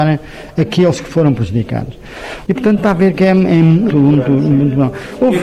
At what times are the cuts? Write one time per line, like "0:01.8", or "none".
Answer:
0:03.9

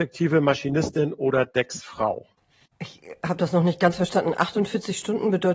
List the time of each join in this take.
0:02.7

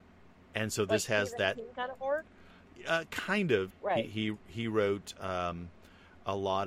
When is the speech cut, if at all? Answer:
0:03.7

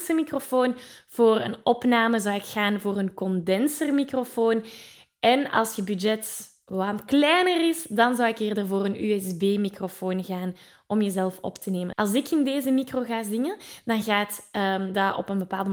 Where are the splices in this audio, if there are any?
0:11.9

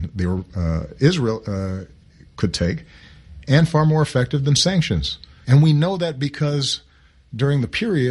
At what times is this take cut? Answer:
0:05.4

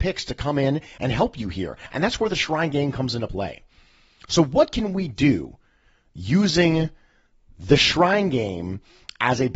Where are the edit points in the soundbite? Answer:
none

